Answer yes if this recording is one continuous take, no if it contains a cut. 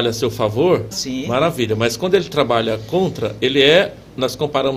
no